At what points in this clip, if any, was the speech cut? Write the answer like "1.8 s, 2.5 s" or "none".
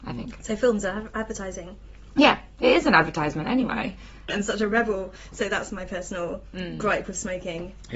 4.3 s